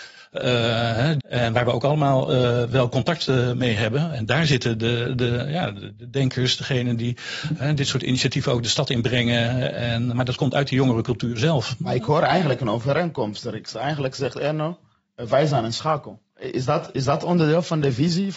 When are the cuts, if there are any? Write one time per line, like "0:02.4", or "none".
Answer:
0:01.2
0:10.1